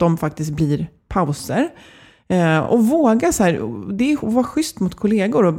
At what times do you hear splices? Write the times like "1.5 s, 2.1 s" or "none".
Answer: none